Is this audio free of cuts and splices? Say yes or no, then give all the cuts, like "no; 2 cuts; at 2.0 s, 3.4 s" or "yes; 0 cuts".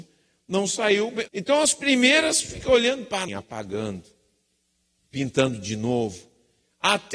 no; 2 cuts; at 1.3 s, 3.3 s